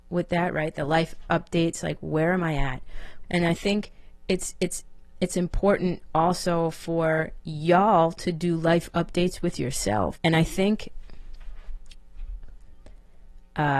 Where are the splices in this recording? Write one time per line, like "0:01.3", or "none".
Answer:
0:03.2
0:10.1